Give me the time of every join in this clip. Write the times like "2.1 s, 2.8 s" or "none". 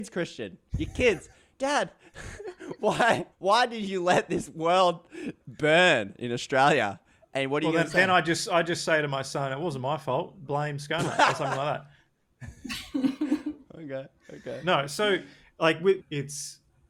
3.3 s, 16.0 s